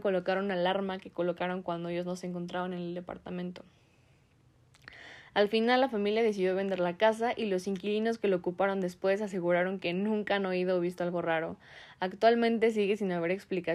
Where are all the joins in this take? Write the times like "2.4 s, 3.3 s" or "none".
none